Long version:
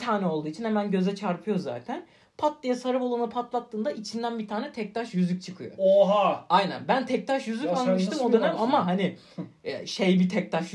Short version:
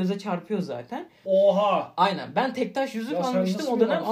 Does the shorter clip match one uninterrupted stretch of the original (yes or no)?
no